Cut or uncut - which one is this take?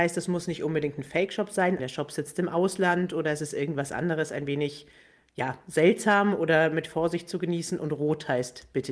cut